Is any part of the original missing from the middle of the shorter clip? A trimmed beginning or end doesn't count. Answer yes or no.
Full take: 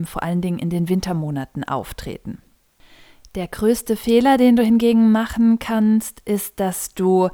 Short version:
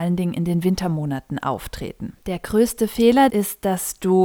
yes